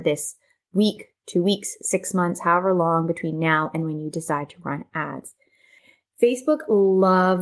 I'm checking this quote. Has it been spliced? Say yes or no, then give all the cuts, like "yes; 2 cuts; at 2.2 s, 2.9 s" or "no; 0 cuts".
no; 0 cuts